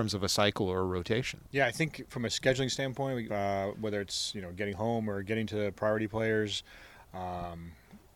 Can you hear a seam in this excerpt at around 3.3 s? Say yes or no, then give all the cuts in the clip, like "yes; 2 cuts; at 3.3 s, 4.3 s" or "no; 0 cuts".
yes; 1 cut; at 3.3 s